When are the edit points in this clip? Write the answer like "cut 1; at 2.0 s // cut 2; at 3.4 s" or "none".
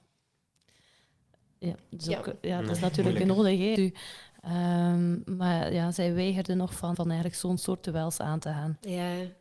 cut 1; at 3.8 s // cut 2; at 6.9 s

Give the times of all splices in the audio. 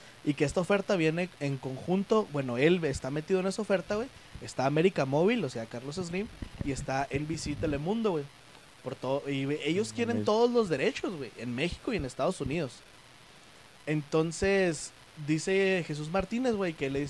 none

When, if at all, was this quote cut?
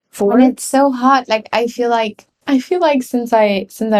none

